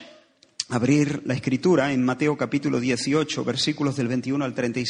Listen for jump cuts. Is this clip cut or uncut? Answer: uncut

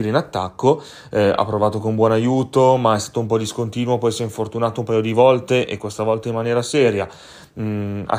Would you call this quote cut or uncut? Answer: uncut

